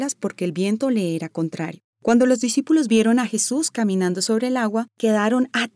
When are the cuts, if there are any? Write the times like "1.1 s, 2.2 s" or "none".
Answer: none